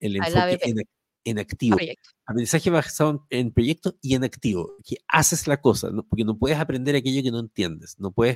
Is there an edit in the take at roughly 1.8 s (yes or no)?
yes